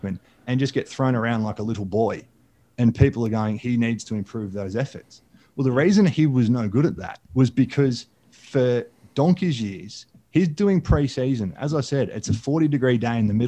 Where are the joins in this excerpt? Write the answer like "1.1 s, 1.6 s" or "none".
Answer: 7.2 s